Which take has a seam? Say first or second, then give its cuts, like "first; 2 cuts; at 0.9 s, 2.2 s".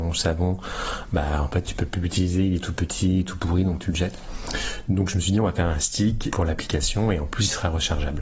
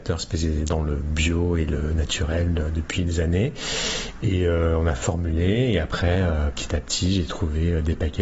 first; 1 cut; at 6.3 s